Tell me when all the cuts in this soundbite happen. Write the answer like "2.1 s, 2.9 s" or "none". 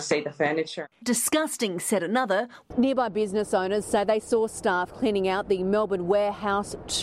1.0 s, 2.7 s